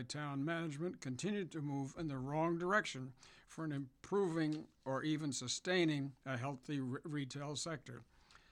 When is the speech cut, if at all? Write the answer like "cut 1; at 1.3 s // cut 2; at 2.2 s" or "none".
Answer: none